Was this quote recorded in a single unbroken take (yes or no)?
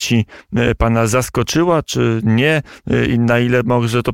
yes